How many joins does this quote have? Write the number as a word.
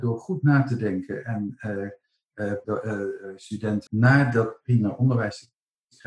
two